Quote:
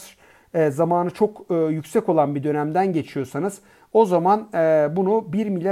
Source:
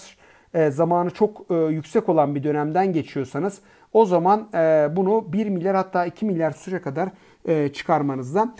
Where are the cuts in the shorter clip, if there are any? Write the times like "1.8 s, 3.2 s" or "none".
none